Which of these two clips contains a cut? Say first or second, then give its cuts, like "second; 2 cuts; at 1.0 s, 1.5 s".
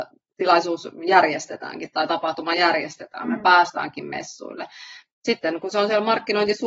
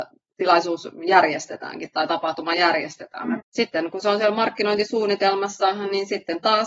second; 1 cut; at 3.4 s